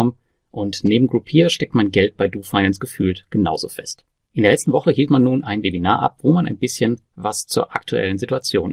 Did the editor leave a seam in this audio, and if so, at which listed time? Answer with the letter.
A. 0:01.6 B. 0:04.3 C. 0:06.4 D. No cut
B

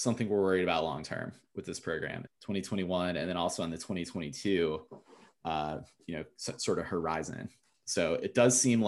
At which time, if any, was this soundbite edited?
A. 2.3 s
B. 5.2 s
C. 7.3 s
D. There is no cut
A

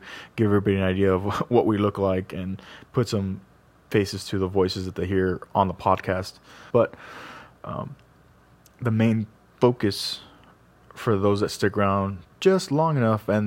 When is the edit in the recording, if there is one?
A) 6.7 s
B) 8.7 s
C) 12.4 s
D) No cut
A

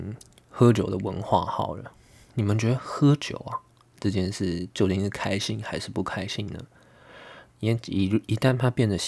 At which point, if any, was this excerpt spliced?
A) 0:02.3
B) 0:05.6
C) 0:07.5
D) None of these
C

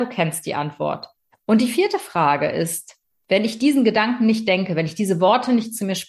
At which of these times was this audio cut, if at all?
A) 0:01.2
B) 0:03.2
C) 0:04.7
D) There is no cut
D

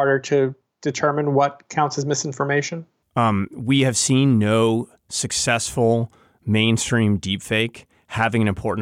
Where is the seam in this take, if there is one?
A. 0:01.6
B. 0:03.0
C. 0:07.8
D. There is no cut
B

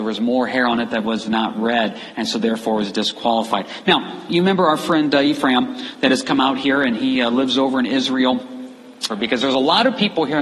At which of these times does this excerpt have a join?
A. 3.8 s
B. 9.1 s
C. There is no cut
B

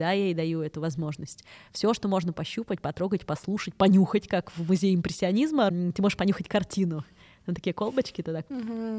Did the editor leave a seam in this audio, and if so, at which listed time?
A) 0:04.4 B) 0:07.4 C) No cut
C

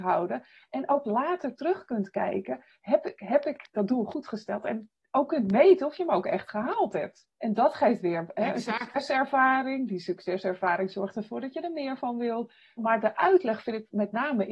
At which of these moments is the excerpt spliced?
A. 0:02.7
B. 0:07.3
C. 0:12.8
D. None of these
C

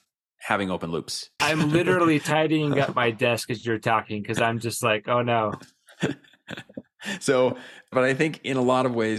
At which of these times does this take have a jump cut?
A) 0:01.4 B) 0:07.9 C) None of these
A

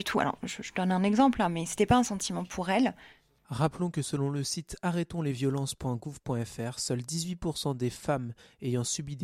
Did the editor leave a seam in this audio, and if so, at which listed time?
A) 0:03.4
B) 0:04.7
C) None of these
A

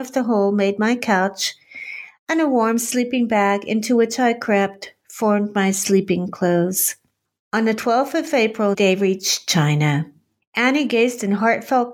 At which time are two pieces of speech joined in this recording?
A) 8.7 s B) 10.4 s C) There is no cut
A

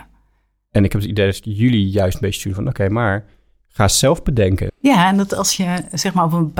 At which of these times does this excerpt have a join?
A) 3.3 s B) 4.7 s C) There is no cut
B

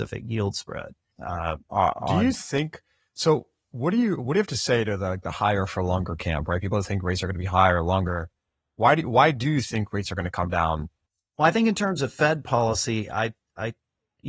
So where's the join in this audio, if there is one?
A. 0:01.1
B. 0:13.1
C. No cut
A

